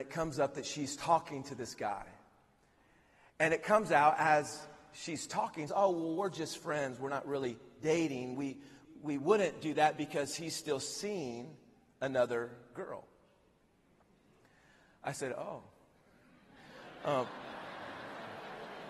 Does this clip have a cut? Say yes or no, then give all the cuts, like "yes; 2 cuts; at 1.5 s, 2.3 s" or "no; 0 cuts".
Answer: yes; 2 cuts; at 5.7 s, 8.8 s